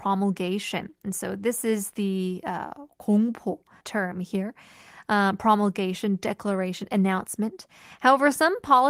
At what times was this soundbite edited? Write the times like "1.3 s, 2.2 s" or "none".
3.8 s